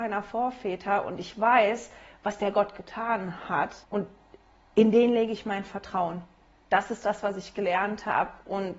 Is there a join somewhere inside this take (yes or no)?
yes